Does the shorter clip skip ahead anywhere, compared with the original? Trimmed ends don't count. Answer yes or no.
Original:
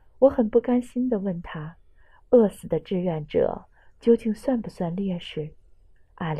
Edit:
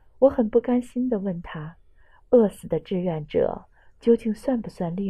no